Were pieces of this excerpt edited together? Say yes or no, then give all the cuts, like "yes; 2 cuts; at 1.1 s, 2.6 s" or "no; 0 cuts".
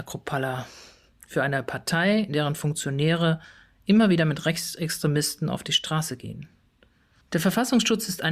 yes; 1 cut; at 7.2 s